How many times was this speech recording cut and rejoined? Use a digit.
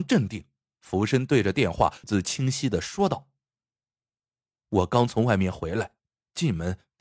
1